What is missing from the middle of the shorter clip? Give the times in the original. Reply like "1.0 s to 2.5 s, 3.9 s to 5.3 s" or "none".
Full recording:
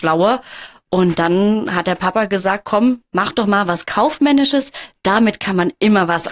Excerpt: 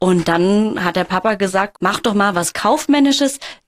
2.6 s to 3.0 s